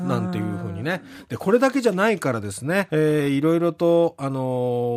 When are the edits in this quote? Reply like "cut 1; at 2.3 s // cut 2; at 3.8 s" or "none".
cut 1; at 2.9 s